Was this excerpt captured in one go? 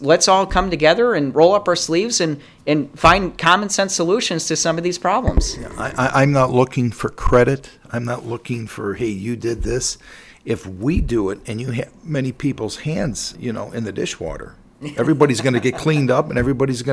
no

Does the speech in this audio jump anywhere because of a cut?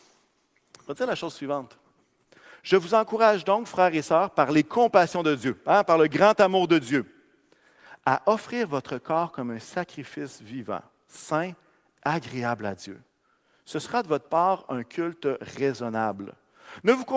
no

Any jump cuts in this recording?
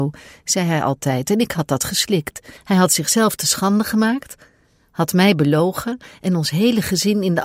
yes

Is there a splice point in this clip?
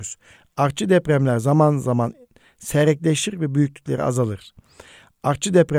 no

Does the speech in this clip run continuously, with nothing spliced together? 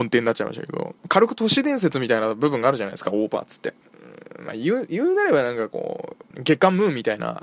no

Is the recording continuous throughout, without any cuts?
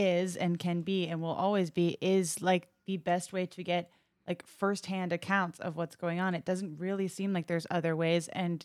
yes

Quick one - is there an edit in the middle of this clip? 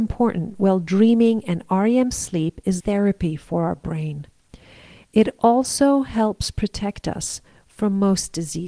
yes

